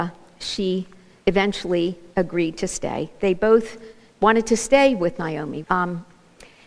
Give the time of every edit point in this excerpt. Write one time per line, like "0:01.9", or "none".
0:05.6